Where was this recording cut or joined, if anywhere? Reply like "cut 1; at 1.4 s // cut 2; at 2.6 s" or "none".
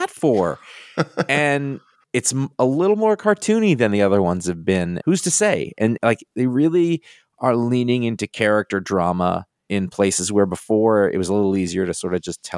cut 1; at 5.0 s